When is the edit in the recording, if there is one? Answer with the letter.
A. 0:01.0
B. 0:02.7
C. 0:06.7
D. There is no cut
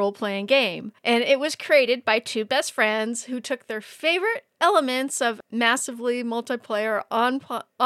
A